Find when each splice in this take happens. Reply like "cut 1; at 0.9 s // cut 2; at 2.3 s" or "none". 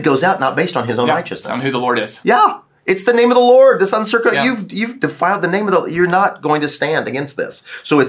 none